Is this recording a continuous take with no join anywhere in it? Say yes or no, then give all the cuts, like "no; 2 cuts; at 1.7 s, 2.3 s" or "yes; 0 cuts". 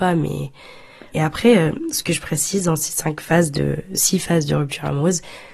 no; 1 cut; at 1.1 s